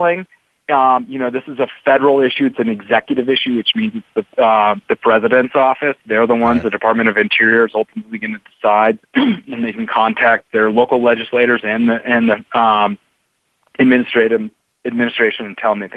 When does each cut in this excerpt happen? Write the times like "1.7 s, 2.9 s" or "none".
9.0 s